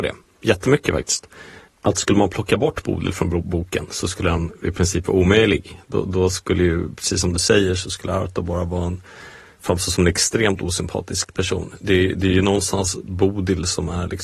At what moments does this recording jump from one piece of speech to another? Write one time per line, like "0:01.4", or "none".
none